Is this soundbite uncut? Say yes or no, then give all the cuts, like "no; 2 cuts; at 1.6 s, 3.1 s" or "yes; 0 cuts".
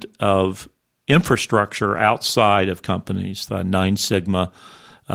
no; 1 cut; at 3.5 s